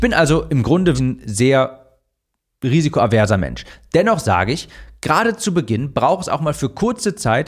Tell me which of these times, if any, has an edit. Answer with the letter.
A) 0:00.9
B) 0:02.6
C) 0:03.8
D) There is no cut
A